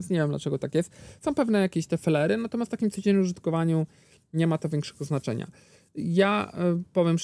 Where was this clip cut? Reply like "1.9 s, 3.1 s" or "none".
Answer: none